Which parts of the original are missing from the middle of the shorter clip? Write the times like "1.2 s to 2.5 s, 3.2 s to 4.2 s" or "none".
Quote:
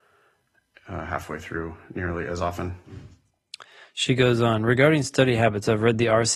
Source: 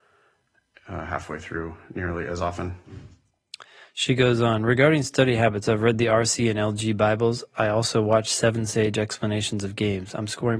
none